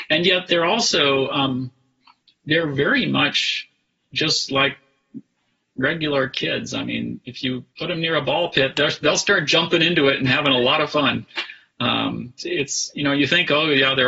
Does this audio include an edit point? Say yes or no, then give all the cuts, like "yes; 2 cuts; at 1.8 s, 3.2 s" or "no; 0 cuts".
yes; 2 cuts; at 7.7 s, 12.4 s